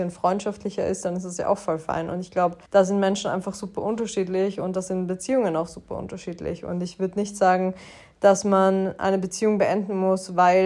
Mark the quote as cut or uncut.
cut